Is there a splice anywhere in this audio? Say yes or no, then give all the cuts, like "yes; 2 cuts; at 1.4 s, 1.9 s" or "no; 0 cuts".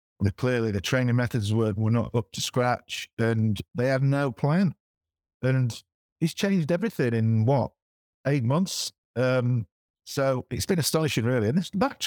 no; 0 cuts